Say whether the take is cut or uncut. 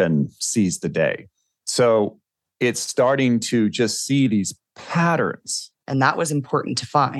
cut